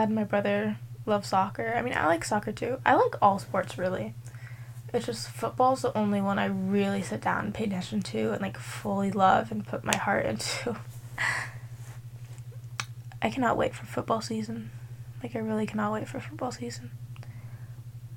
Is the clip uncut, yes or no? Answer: yes